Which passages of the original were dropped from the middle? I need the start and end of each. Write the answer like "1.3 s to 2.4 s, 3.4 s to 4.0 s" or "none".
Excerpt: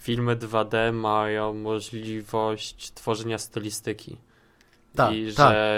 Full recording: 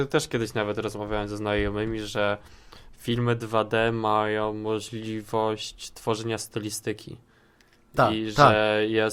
none